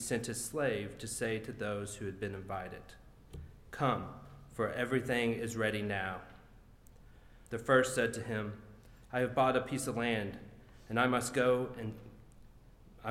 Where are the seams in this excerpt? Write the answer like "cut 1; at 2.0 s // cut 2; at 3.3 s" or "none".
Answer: cut 1; at 7.4 s